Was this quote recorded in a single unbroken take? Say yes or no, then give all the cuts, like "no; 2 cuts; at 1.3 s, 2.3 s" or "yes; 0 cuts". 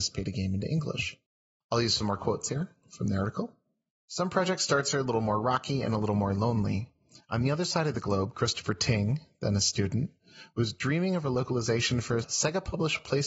yes; 0 cuts